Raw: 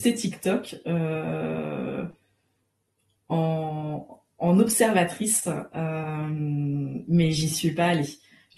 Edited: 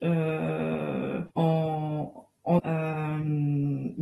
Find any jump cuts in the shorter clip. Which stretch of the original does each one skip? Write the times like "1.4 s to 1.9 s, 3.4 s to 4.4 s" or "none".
2.1 s to 3.2 s, 4.5 s to 5.7 s